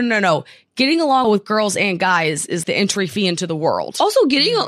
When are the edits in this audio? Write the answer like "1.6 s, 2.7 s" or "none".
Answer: 1.2 s, 2.6 s